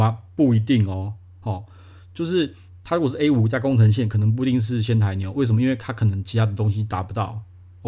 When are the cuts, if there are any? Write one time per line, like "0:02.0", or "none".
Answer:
none